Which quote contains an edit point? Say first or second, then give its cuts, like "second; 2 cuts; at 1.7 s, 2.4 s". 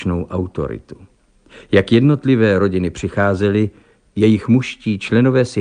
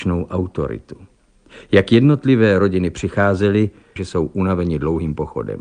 second; 1 cut; at 4.0 s